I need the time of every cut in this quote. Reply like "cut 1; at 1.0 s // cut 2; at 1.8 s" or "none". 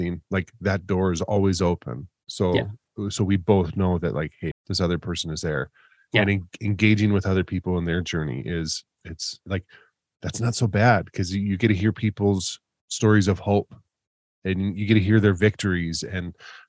cut 1; at 4.5 s // cut 2; at 9.4 s